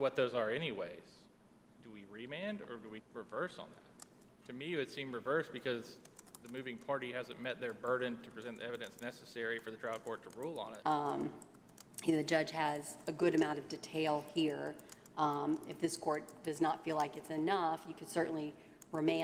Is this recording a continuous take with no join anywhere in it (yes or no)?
no